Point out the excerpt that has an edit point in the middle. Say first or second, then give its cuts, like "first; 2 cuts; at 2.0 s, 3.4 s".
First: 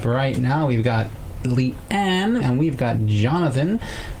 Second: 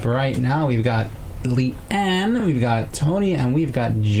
first; 1 cut; at 2.4 s